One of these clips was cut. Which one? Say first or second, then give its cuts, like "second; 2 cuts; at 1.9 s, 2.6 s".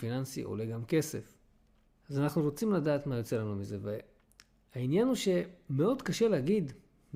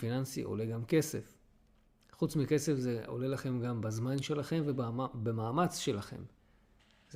first; 1 cut; at 1.9 s